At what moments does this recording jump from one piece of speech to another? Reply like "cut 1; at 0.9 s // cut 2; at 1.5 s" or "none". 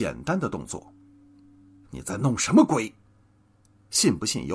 cut 1; at 1.8 s